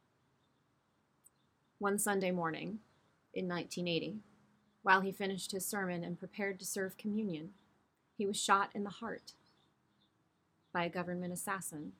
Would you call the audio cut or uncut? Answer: uncut